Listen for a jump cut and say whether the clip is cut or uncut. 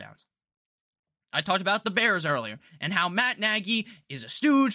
uncut